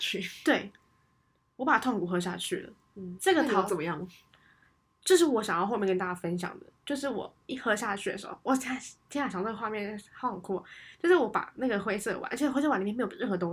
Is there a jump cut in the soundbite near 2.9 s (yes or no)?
no